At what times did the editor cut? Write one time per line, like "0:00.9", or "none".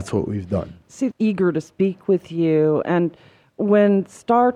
0:01.1